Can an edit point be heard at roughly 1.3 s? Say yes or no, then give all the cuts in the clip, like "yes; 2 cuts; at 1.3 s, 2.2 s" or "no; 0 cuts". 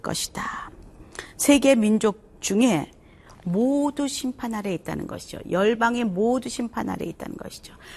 no; 0 cuts